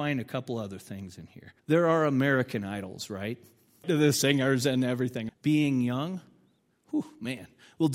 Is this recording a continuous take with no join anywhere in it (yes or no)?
no